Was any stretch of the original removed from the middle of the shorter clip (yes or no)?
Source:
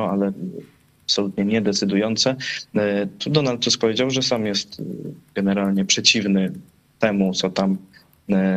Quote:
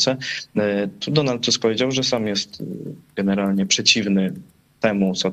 no